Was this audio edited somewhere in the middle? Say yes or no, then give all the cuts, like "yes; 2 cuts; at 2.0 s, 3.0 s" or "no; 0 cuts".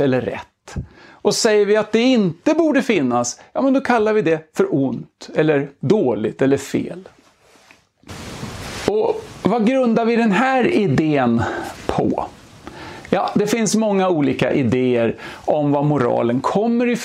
no; 0 cuts